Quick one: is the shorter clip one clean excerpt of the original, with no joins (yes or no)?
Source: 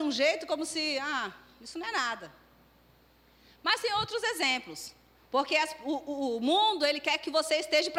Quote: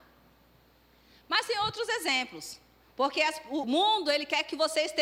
no